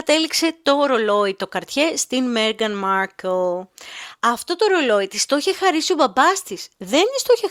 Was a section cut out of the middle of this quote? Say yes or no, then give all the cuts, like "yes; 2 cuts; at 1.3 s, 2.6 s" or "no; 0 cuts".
no; 0 cuts